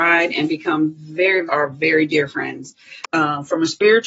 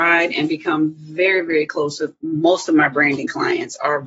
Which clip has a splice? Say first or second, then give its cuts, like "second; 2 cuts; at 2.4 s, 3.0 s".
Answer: first; 2 cuts; at 1.5 s, 3.0 s